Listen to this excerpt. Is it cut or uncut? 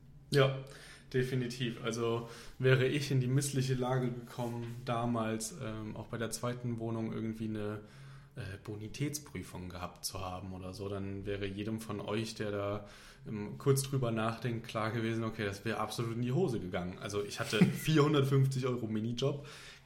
uncut